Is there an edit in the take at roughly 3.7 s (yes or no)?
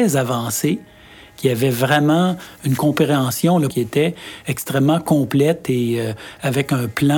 yes